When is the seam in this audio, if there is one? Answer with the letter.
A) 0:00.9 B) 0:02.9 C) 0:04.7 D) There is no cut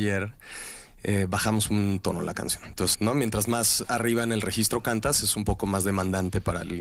B